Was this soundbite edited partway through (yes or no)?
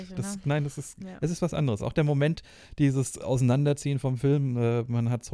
no